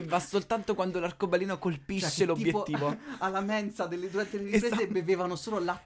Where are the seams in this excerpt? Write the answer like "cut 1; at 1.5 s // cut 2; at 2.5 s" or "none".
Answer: none